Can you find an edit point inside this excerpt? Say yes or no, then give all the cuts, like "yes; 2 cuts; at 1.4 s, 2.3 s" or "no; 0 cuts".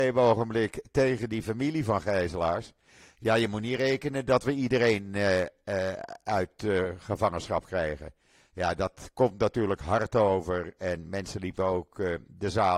no; 0 cuts